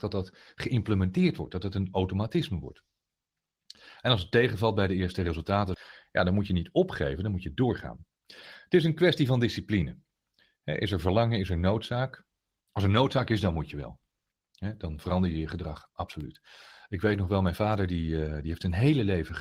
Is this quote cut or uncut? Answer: uncut